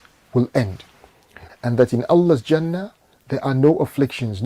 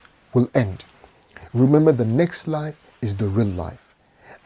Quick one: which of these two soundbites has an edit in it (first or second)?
first